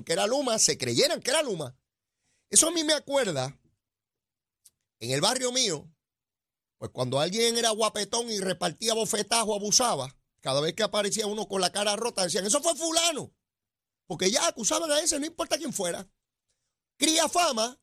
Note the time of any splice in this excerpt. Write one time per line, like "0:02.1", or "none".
none